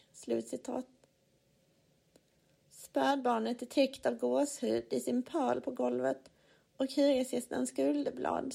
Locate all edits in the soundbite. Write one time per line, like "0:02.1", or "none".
none